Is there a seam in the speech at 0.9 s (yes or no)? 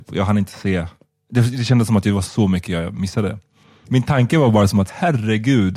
no